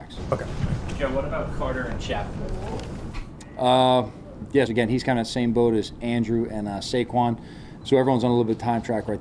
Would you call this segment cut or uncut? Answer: cut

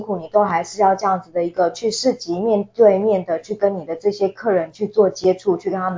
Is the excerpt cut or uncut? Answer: uncut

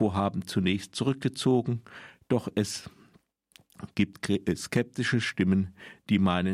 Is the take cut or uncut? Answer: uncut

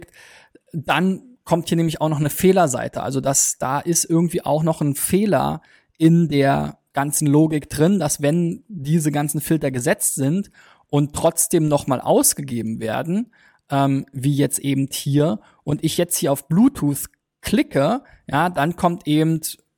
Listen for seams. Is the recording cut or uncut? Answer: uncut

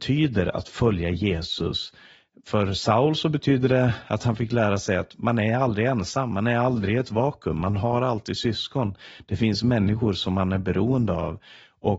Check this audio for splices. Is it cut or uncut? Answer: uncut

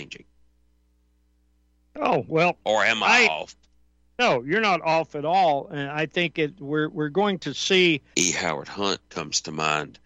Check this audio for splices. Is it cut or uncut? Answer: cut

